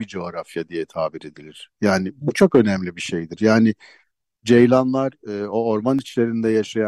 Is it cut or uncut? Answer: uncut